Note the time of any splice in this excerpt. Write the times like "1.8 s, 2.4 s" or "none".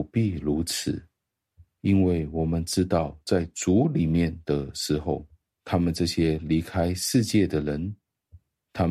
none